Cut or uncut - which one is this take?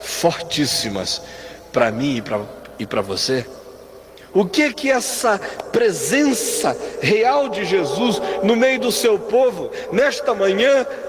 cut